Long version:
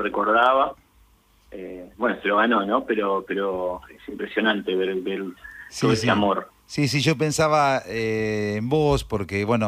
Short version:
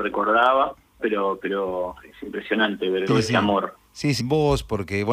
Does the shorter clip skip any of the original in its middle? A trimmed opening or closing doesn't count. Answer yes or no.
yes